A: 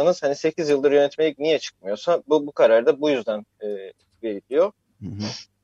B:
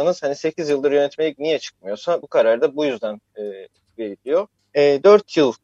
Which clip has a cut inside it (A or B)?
B